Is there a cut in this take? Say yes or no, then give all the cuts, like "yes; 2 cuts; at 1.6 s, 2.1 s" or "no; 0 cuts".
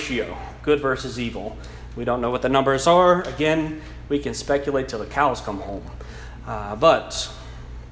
no; 0 cuts